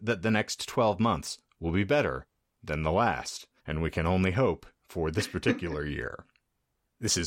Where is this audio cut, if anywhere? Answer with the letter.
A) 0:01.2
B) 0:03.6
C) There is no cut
B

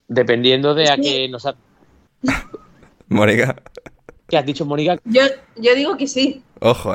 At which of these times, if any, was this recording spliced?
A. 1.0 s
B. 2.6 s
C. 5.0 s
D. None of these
C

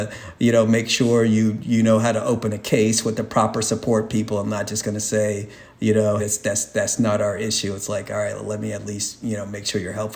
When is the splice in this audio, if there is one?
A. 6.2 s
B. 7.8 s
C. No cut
A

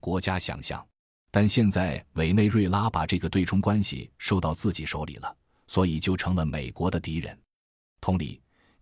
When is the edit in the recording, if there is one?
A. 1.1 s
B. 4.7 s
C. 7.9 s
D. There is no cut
A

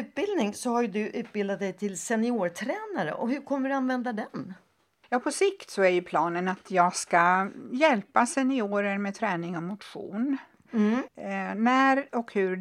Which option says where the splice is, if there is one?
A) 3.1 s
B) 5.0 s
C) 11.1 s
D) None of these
C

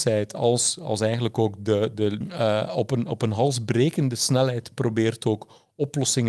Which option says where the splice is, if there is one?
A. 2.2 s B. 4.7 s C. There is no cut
A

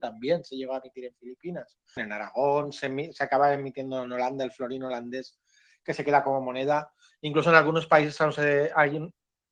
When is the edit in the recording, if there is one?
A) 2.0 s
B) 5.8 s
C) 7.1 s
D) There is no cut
A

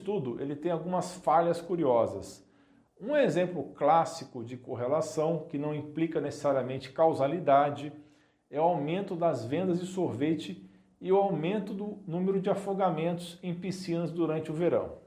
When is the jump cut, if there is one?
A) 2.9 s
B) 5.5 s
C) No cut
A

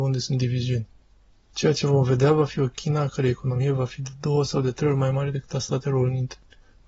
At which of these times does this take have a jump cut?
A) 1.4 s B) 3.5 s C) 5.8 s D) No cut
A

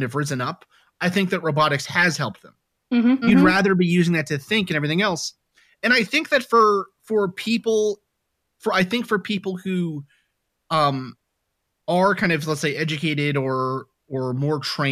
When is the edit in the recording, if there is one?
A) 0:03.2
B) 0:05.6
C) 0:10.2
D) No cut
A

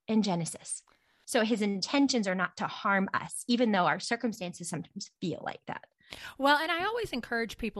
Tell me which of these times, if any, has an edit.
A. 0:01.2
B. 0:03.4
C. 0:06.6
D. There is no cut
A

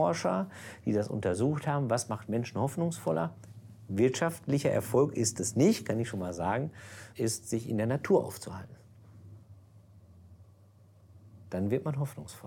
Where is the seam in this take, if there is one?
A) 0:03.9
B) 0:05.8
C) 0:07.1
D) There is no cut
C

